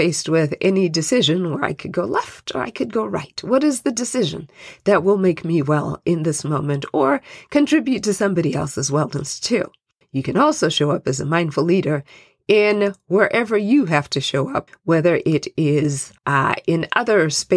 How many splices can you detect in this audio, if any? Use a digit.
3